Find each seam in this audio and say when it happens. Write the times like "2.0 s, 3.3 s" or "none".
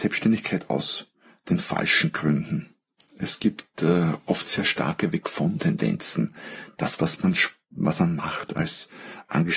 none